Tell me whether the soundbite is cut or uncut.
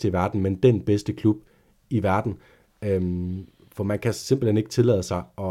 uncut